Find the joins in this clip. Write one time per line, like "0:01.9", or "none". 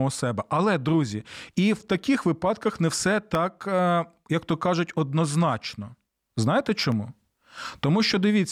none